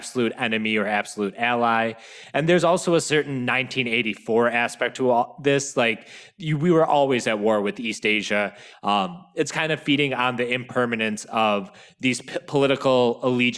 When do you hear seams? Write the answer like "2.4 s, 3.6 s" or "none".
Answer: 8.7 s